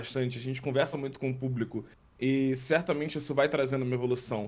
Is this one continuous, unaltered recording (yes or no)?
yes